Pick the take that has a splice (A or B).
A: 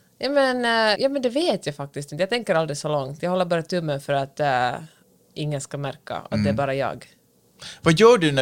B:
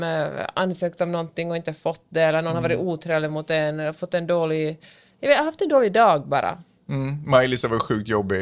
A